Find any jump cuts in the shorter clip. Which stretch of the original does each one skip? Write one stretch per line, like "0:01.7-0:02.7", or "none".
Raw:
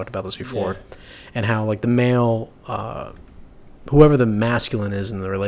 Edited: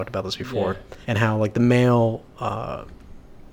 0:01.0-0:01.3